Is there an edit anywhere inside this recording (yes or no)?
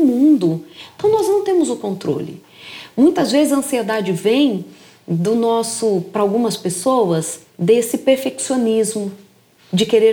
yes